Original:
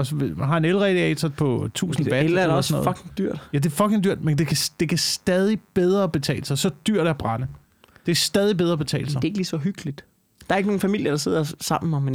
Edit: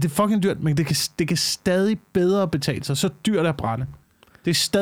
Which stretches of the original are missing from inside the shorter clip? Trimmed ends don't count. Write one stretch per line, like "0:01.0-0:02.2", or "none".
none